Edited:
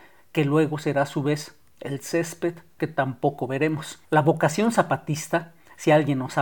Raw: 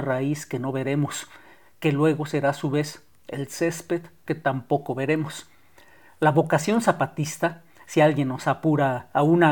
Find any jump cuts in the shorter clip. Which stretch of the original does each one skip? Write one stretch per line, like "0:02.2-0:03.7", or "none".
0:05.5-0:06.1